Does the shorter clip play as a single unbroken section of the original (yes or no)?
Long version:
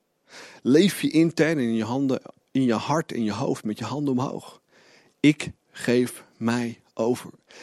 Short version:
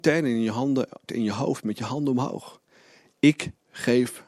no